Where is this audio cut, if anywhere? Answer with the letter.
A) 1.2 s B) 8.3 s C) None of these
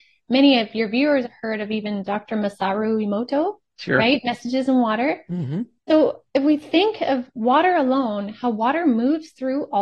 A